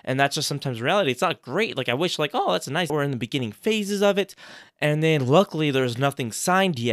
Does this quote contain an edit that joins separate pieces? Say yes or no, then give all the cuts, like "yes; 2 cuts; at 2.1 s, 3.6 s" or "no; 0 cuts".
yes; 1 cut; at 2.9 s